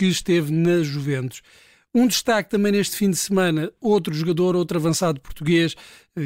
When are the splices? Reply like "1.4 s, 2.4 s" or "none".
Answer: none